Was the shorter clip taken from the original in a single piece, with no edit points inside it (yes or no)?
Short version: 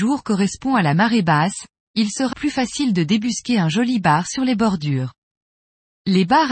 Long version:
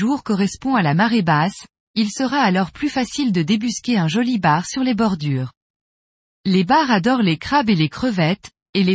no